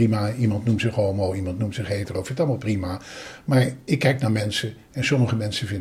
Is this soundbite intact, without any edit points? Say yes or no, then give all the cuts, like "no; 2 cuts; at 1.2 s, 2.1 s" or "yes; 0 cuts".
yes; 0 cuts